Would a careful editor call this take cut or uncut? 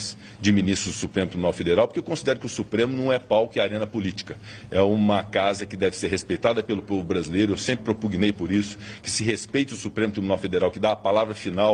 uncut